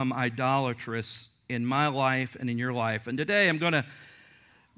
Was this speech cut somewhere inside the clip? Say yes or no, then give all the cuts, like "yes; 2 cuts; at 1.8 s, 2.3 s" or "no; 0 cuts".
no; 0 cuts